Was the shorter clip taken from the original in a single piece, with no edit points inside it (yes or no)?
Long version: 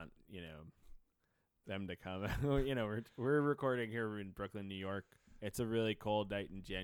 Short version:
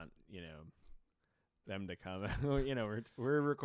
yes